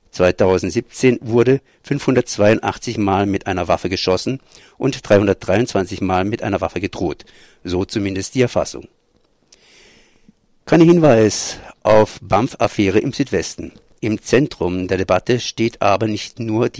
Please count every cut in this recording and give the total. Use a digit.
1